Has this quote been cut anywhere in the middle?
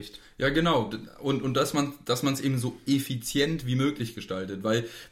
no; 0 cuts

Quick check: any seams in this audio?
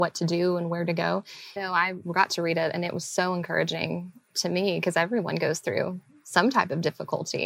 yes; 1 cut; at 1.6 s

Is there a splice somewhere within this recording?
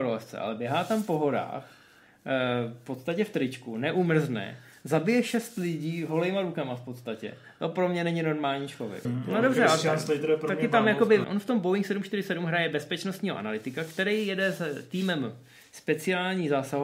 yes; 2 cuts; at 9.0 s, 11.2 s

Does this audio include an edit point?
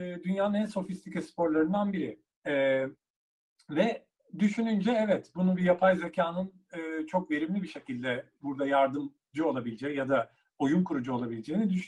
yes; 1 cut; at 2.2 s

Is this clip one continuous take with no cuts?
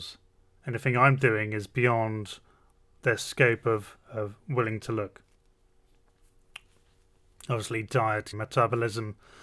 no; 1 cut; at 8.3 s

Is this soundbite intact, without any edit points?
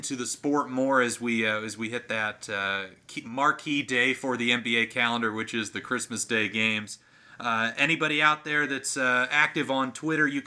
yes; 0 cuts

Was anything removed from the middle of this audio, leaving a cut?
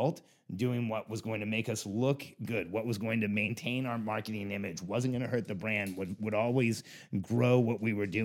no; 0 cuts

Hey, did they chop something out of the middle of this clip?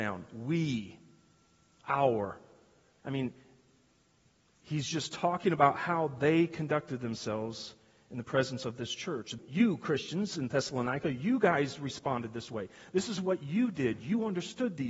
yes; 2 cuts; at 1.8 s, 9.4 s

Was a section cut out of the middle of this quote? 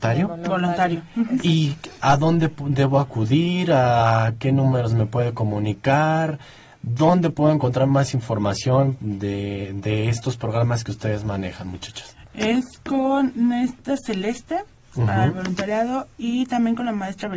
no; 0 cuts

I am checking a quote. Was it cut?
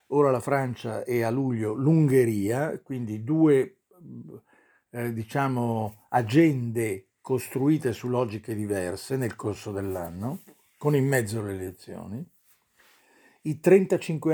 no; 0 cuts

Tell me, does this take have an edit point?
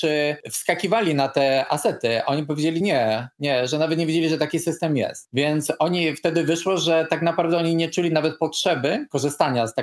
no; 0 cuts

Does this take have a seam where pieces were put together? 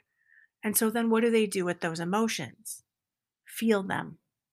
no; 0 cuts

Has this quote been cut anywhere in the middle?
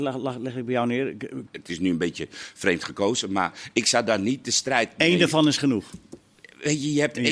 yes; 1 cut; at 1.5 s

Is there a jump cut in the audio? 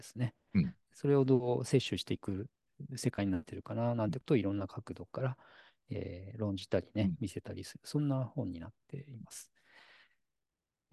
no; 0 cuts

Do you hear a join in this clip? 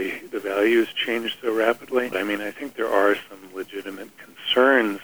yes; 1 cut; at 2.1 s

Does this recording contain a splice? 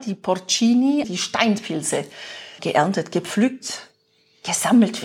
yes; 2 cuts; at 1.0 s, 2.6 s

